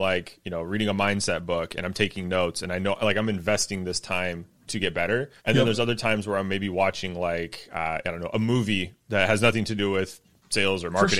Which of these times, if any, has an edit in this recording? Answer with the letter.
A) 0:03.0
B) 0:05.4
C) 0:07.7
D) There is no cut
B